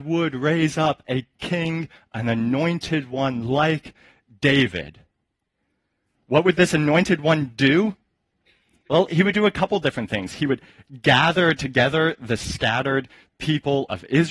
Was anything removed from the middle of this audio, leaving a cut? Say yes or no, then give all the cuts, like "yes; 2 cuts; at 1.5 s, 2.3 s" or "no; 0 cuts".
no; 0 cuts